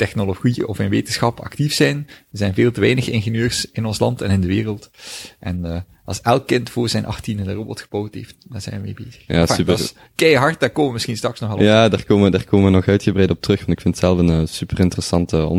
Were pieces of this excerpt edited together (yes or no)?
no